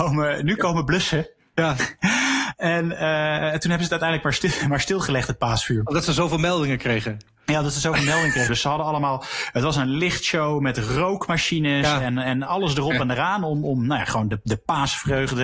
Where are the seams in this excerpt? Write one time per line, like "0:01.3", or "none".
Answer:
0:08.5